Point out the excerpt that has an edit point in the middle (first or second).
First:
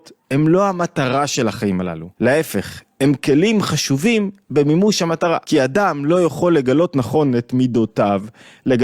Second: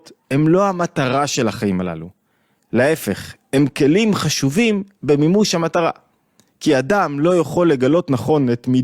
first